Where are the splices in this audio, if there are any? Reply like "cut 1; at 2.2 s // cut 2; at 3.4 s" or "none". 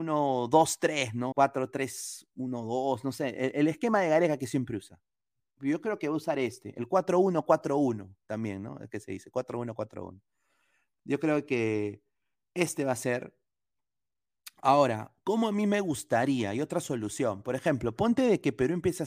cut 1; at 1.3 s